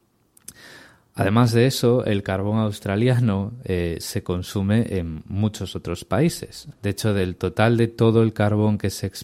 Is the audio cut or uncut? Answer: cut